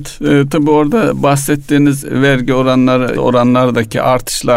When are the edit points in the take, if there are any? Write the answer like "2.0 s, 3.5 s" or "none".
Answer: 3.1 s